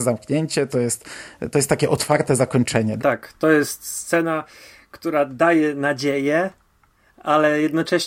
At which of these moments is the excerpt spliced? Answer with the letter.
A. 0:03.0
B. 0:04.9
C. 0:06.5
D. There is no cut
A